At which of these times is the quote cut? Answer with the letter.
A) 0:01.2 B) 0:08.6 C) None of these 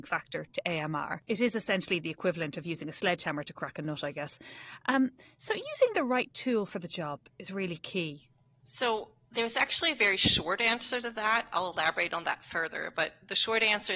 B